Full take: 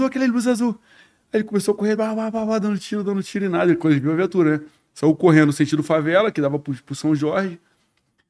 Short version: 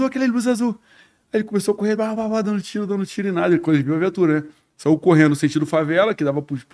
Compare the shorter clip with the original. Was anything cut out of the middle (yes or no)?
yes